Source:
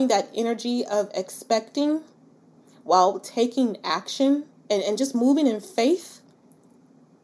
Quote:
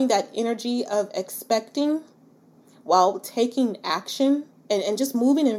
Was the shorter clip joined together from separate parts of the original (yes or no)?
no